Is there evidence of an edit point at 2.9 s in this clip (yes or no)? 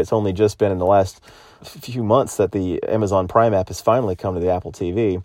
no